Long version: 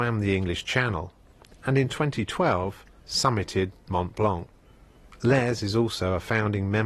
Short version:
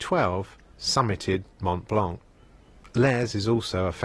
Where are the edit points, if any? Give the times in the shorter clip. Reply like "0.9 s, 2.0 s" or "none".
none